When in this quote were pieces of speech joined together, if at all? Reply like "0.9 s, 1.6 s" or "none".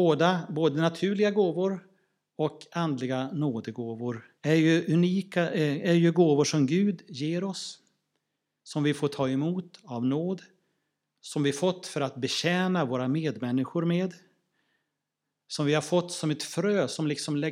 4.4 s